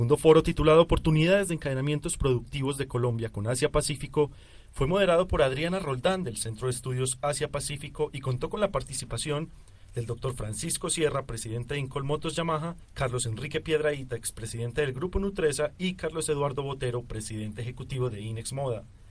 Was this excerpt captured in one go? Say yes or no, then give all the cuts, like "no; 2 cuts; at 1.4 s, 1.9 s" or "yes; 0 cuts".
no; 1 cut; at 12.8 s